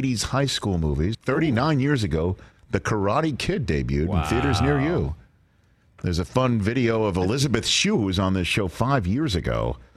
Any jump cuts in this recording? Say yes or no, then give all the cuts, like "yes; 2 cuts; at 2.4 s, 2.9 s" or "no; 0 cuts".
yes; 1 cut; at 1.1 s